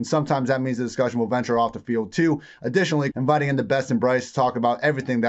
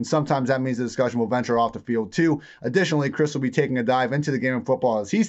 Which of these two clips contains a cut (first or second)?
first